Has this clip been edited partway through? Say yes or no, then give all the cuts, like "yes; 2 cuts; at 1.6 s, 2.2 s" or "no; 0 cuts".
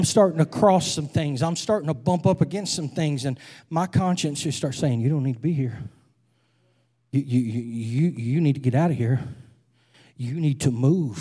no; 0 cuts